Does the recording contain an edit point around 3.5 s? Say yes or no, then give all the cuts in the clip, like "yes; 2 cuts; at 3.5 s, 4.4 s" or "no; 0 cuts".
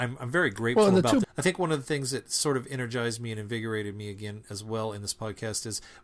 no; 1 cut; at 1.2 s